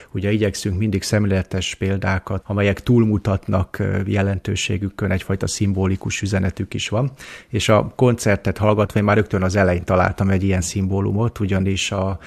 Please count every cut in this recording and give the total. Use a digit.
1